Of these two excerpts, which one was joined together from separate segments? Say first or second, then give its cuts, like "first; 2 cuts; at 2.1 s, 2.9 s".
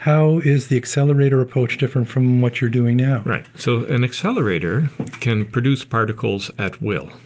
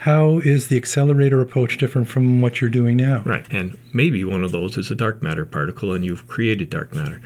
second; 1 cut; at 3.5 s